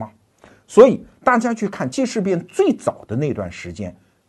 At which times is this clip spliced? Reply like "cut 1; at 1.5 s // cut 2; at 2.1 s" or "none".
cut 1; at 1.9 s